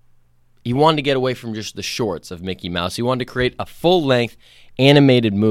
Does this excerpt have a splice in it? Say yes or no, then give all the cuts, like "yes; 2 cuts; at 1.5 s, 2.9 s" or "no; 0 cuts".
no; 0 cuts